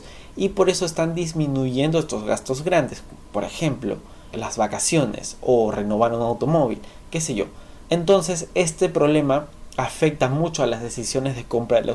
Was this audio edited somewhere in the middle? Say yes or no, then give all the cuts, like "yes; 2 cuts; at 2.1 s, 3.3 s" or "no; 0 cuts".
yes; 2 cuts; at 4.3 s, 7.8 s